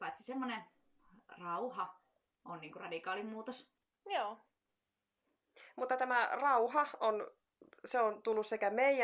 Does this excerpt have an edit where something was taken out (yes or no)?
no